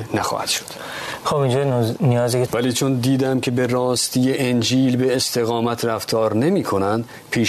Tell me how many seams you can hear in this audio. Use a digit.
1